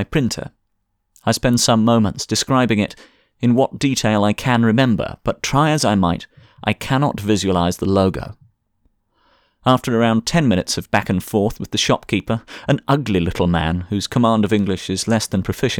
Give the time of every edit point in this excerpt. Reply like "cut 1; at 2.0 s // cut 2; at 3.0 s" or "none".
none